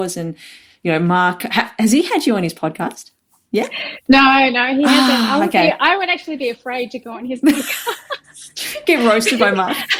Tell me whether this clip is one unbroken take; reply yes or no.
yes